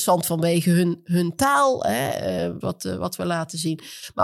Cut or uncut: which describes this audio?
cut